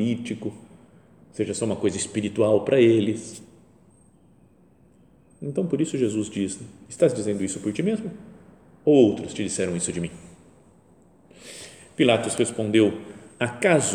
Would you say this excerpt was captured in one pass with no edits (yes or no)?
yes